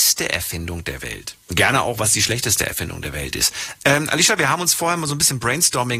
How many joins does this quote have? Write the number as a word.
two